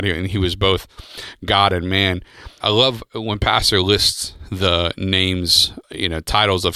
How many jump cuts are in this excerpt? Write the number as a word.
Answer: two